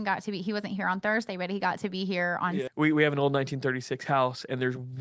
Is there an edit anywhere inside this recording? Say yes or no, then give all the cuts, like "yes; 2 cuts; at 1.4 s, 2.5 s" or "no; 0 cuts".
yes; 1 cut; at 2.7 s